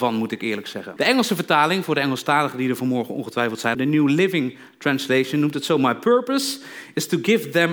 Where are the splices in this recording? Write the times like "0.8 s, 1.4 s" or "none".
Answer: 1.0 s, 3.7 s